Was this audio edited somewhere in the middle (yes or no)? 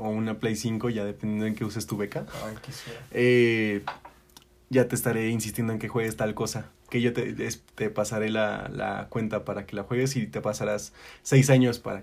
no